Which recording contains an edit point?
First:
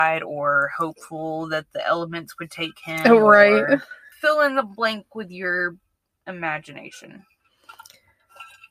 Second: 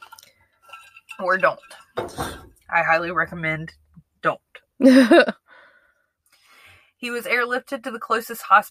first; 1 cut; at 4.1 s

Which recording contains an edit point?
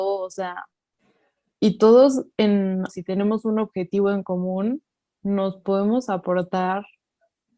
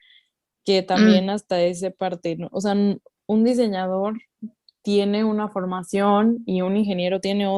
first; 1 cut; at 2.9 s

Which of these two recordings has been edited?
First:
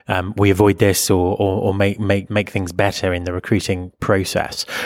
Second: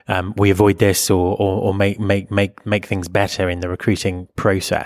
first; 1 cut; at 2.3 s

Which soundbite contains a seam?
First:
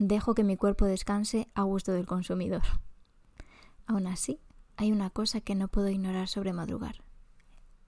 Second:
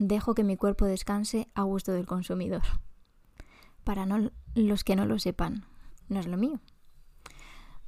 second; 2 cuts; at 3.8 s, 6.0 s

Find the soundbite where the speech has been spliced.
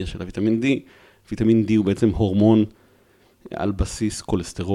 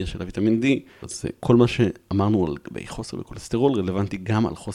second; 1 cut; at 1.0 s

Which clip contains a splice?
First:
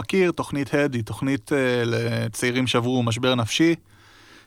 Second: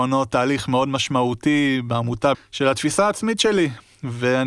second; 1 cut; at 2.3 s

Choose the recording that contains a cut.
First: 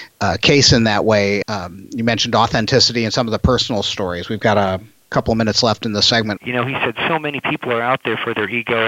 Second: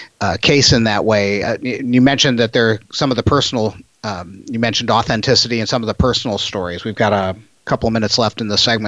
first; 2 cuts; at 1.4 s, 6.4 s

